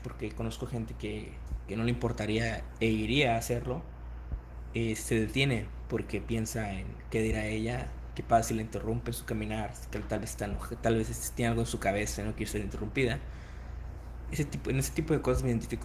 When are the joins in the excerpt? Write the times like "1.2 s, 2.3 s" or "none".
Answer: none